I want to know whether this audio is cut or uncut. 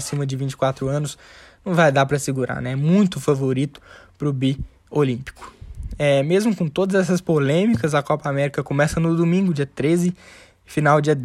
uncut